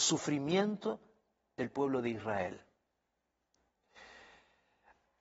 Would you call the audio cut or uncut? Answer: uncut